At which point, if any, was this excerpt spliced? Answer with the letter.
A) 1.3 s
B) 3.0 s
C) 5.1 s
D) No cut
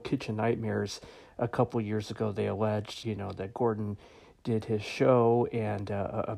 B